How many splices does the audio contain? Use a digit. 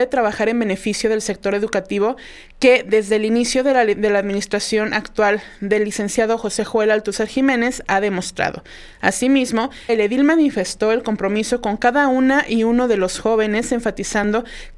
1